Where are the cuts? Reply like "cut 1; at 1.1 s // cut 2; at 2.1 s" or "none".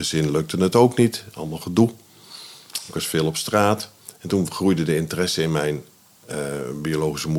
none